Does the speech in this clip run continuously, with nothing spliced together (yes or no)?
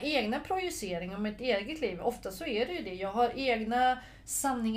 yes